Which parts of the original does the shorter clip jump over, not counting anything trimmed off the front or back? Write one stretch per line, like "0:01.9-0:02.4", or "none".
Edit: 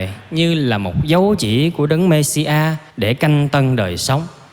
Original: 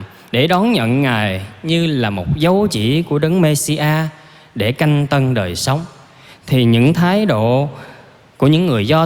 0:04.2-0:04.5